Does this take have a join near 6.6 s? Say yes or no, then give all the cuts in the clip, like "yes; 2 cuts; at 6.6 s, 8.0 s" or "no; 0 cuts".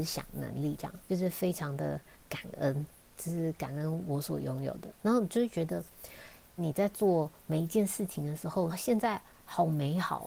yes; 3 cuts; at 1.1 s, 6.6 s, 8.7 s